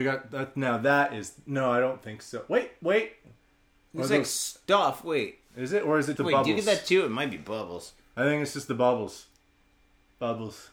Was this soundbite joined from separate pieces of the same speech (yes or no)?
yes